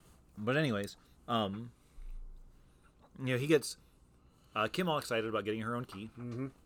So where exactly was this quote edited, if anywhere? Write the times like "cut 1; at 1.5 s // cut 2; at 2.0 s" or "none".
none